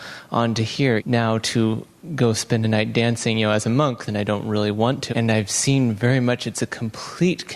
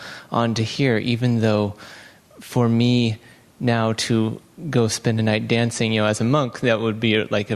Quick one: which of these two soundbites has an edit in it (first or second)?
first